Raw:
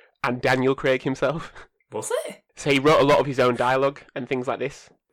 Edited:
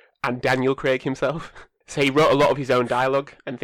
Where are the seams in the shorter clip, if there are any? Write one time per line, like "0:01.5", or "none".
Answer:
0:01.8